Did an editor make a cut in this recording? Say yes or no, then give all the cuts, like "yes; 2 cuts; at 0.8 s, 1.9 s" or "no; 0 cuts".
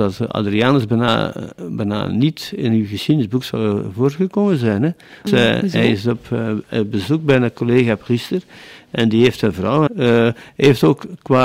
yes; 2 cuts; at 5.3 s, 9.9 s